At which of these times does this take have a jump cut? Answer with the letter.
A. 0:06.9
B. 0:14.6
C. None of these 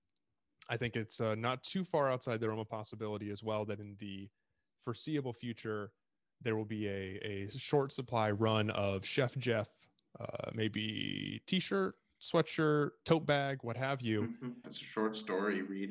B